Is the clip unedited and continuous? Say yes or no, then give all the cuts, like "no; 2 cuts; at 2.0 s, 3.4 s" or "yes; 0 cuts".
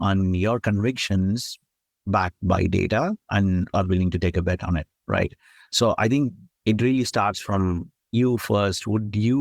yes; 0 cuts